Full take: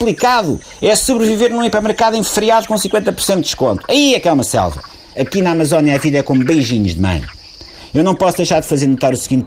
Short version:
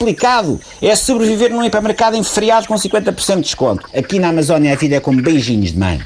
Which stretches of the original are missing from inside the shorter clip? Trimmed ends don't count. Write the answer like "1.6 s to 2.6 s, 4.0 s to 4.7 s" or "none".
3.9 s to 5.1 s